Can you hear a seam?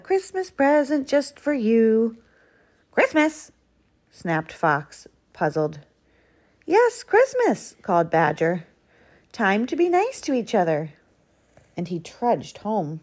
no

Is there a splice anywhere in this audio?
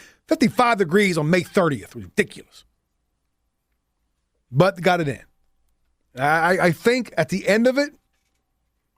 no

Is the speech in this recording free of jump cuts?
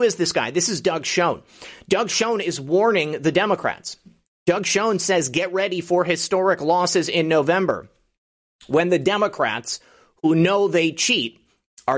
yes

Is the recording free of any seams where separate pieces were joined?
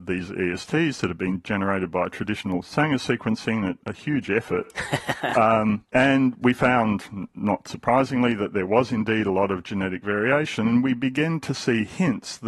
yes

